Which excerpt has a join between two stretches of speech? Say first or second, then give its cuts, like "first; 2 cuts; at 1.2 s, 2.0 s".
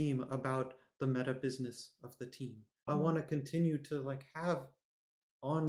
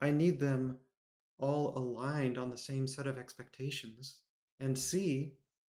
first; 1 cut; at 2.9 s